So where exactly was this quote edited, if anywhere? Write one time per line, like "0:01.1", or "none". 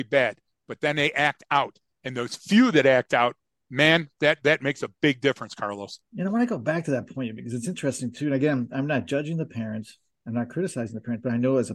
none